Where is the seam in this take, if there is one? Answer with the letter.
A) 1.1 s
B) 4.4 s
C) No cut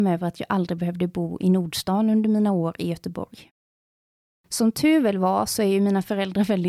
B